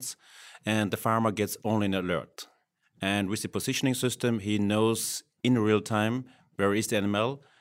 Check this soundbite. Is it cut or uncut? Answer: uncut